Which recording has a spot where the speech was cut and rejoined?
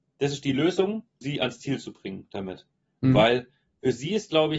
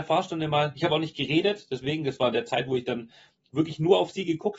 first; 1 cut; at 1.2 s

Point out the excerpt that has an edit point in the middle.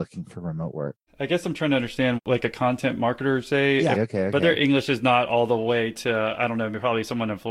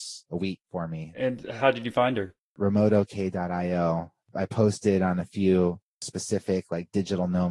first; 2 cuts; at 1.1 s, 3.9 s

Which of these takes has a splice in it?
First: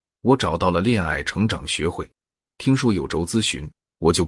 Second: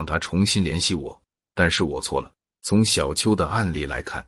second; 1 cut; at 2.6 s

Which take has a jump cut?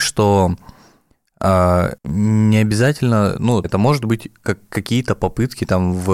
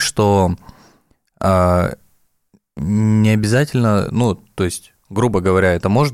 first; 2 cuts; at 2.0 s, 3.6 s

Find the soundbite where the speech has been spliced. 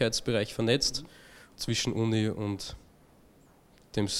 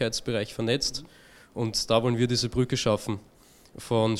first; 1 cut; at 1.5 s

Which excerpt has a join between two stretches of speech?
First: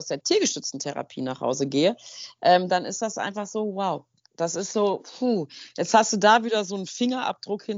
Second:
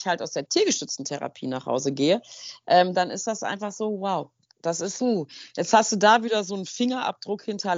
second; 1 cut; at 5.0 s

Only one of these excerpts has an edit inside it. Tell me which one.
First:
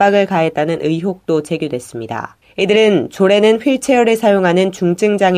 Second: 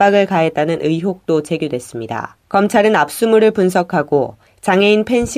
first; 1 cut; at 2.4 s

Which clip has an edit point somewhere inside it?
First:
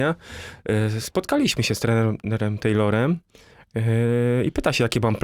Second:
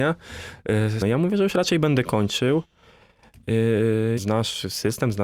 second; 2 cuts; at 1.0 s, 4.2 s

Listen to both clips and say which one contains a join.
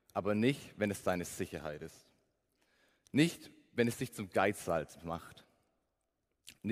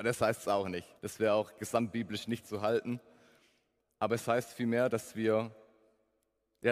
second; 1 cut; at 1.0 s

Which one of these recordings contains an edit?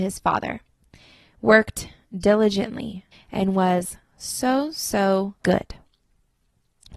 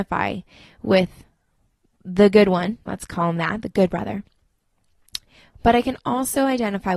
first; 2 cuts; at 3.1 s, 5.4 s

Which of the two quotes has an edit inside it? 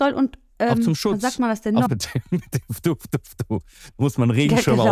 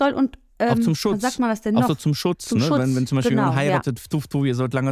first; 1 cut; at 1.9 s

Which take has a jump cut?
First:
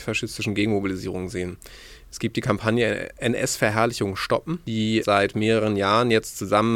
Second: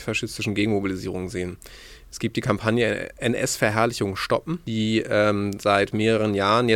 first; 1 cut; at 5.0 s

